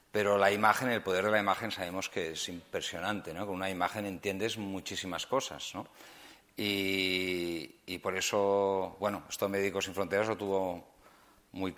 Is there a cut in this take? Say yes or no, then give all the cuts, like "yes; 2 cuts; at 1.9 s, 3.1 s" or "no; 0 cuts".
no; 0 cuts